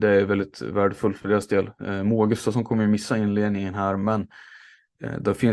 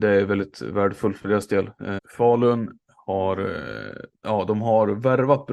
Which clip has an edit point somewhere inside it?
second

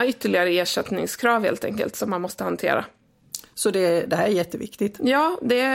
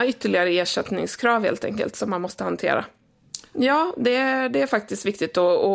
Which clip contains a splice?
second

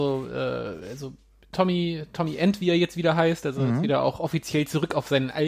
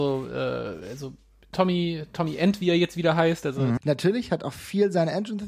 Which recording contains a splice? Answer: second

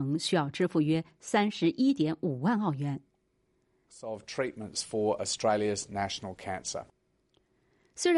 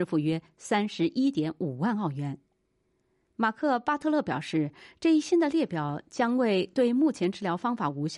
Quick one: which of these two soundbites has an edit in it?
first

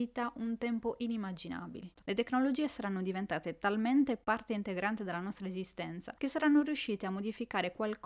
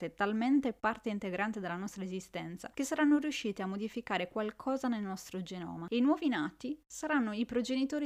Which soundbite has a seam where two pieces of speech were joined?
first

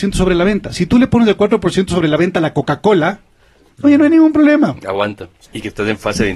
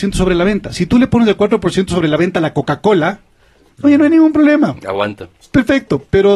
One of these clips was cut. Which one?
first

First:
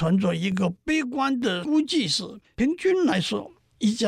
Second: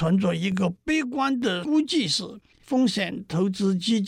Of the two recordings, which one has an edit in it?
first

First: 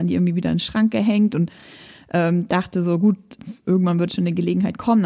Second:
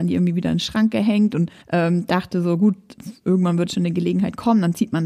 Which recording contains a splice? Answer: second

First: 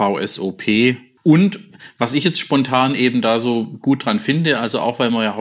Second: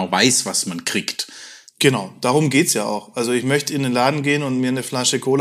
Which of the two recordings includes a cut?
first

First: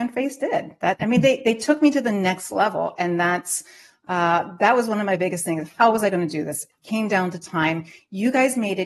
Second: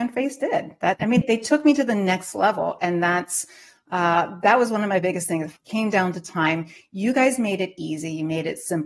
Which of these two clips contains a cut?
second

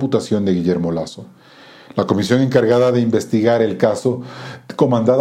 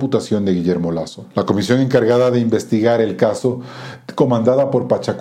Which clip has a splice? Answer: second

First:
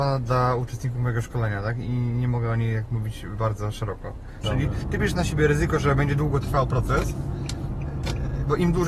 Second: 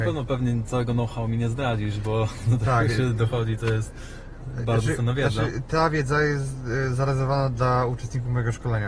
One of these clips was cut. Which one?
first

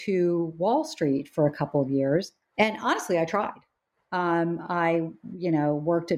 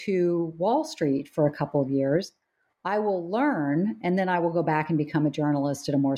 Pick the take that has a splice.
first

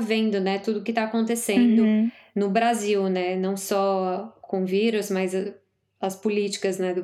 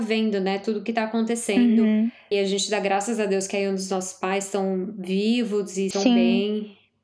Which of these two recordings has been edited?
second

